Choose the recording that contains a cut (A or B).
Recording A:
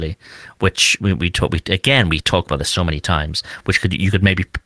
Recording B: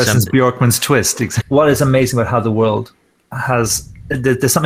B